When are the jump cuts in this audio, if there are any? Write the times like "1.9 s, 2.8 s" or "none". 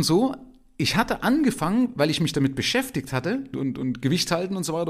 3.5 s